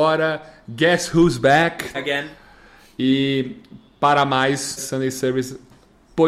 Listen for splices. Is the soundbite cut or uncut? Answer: cut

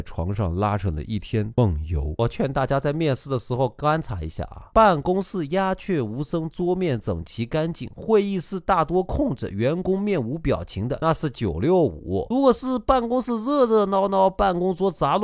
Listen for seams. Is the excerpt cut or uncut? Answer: uncut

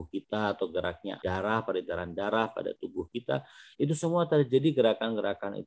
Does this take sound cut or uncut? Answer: cut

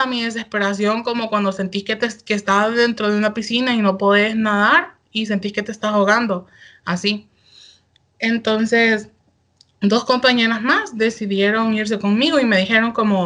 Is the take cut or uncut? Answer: uncut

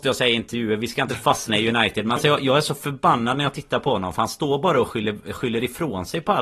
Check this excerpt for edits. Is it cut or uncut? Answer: uncut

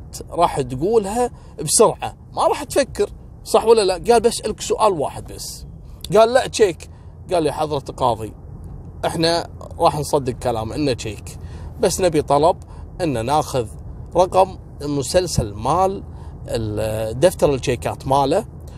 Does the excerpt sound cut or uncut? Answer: cut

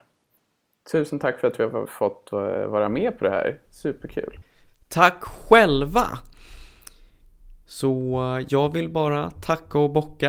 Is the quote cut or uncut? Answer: cut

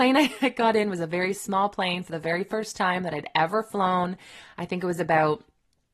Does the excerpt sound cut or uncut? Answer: uncut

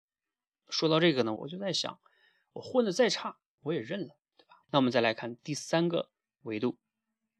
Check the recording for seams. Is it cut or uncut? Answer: cut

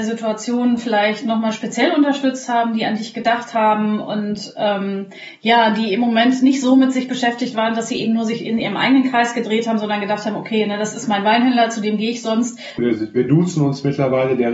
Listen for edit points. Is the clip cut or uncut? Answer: cut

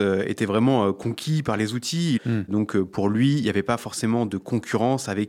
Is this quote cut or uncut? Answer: cut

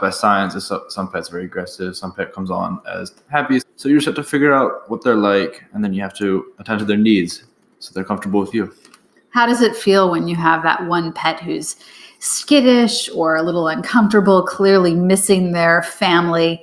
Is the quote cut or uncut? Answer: cut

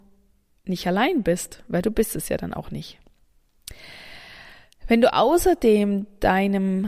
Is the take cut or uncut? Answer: uncut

